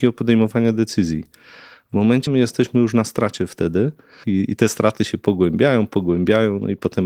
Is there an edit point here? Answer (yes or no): yes